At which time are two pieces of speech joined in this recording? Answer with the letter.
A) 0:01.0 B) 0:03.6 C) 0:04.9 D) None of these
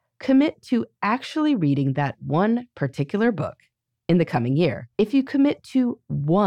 C